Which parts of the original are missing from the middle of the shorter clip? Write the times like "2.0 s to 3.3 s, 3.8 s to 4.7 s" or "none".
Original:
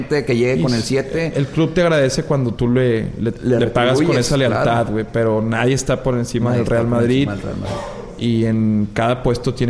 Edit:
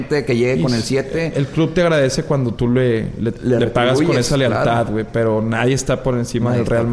none